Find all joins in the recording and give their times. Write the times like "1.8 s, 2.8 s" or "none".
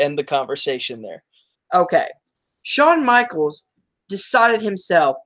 1.5 s